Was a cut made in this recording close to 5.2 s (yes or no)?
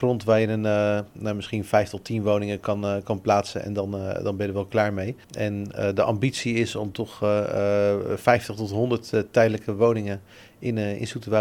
yes